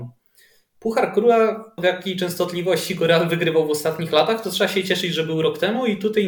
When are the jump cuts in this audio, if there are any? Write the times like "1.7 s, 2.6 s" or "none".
1.8 s